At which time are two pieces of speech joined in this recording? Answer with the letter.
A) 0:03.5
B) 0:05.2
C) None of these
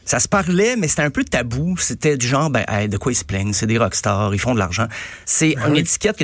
B